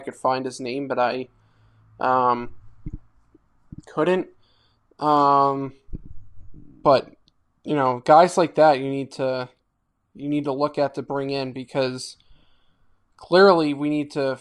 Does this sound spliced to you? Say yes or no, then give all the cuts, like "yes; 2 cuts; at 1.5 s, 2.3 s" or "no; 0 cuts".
no; 0 cuts